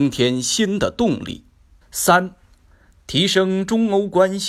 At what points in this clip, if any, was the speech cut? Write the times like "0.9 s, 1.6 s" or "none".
1.8 s

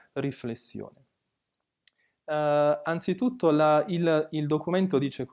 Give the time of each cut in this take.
none

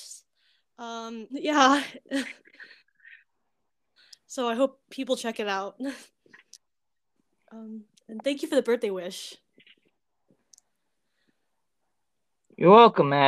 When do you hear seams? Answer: 1.3 s

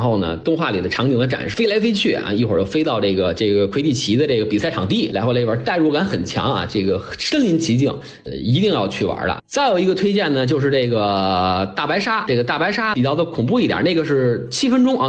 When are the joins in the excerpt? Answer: 9.4 s

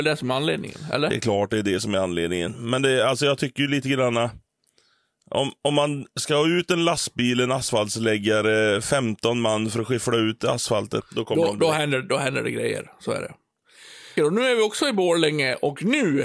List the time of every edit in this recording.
11.0 s, 14.2 s

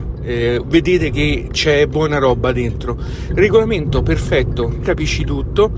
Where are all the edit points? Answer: 3.3 s, 4.8 s

